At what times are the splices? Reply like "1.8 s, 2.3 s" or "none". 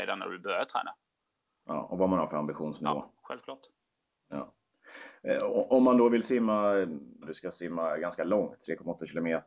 7.2 s